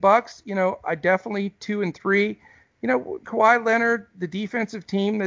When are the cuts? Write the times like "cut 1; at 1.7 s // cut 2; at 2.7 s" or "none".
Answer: cut 1; at 3.2 s